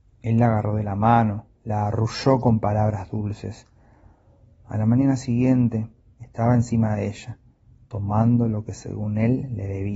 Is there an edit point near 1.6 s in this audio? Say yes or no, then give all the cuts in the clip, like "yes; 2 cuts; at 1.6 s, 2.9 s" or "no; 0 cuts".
yes; 2 cuts; at 1.6 s, 6.0 s